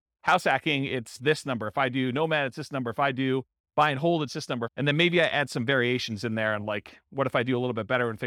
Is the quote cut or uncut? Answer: cut